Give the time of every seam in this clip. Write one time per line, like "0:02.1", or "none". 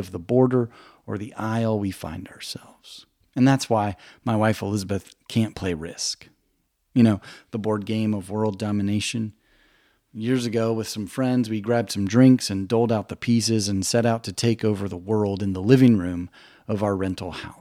none